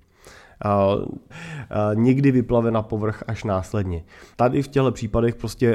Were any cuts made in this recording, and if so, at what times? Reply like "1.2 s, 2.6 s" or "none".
1.3 s, 4.3 s